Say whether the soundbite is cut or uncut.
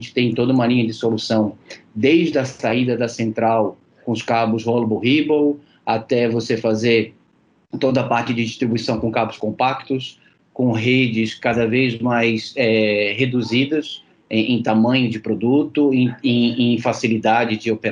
uncut